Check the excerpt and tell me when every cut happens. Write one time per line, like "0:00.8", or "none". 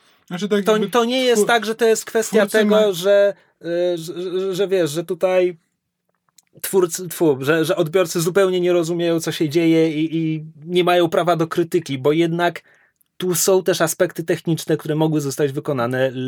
none